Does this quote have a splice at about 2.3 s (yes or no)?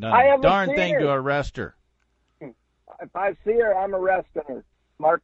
yes